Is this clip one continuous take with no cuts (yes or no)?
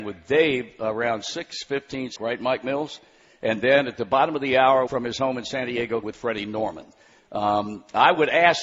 no